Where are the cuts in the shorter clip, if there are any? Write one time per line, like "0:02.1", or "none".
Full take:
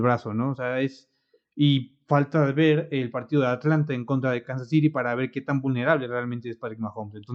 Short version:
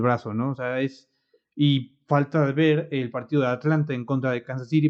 none

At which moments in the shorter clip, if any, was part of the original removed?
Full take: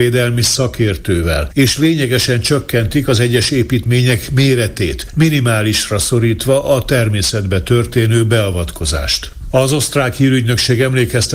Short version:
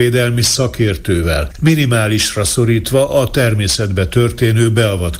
0:01.5

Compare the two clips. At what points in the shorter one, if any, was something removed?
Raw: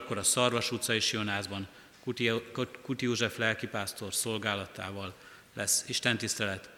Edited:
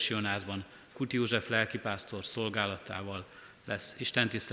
0:00.9

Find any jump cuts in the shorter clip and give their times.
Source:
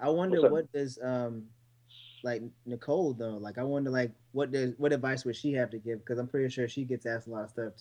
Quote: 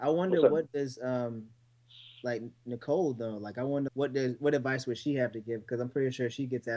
0:03.9

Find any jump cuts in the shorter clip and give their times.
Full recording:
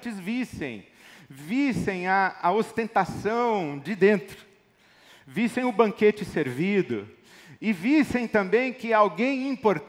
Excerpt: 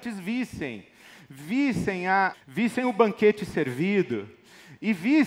0:02.3

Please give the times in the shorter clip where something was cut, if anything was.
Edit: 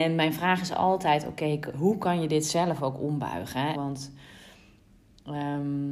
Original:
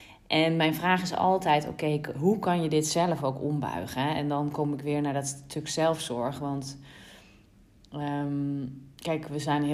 0:03.7

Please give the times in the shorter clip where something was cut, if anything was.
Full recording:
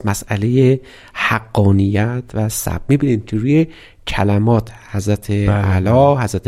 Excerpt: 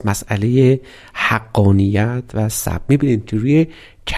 none

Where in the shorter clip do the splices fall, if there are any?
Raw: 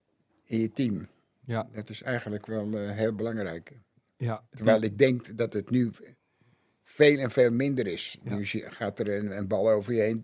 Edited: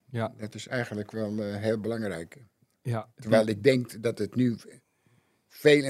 none

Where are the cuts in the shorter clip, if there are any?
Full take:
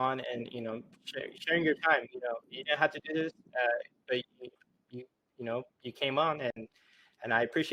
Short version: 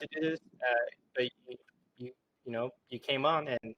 none

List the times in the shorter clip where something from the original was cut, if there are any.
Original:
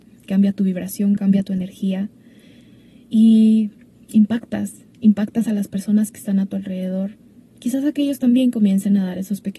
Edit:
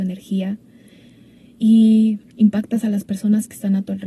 0:02.3

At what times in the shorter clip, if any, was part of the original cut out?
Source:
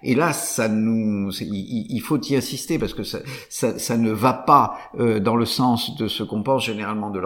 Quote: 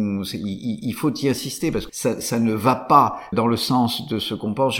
0:01.9
0:03.3

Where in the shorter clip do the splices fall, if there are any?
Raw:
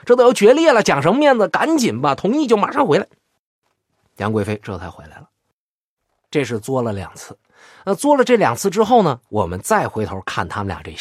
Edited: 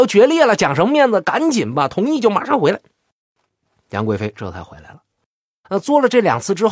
0:05.6

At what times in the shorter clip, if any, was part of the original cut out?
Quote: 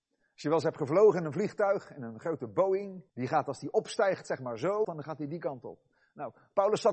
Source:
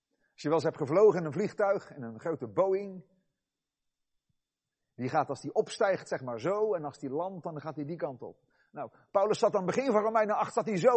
0:03.1
0:04.8

